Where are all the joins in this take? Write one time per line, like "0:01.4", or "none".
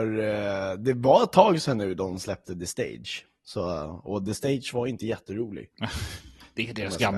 none